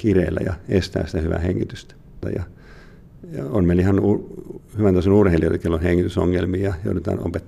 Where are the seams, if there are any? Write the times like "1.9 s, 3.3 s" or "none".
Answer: 2.2 s